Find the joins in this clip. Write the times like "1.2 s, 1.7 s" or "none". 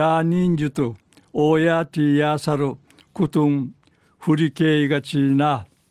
none